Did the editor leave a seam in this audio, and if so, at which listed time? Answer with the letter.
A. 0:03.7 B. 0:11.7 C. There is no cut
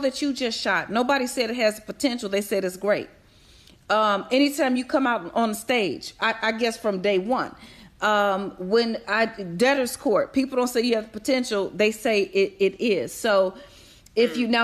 C